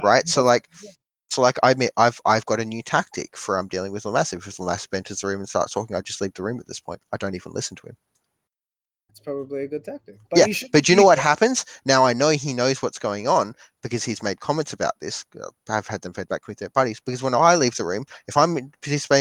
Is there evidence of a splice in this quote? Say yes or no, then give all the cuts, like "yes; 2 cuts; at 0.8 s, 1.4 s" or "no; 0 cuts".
yes; 1 cut; at 10.2 s